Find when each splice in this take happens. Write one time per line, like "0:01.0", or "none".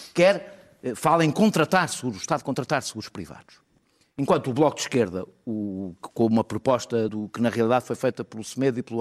0:07.1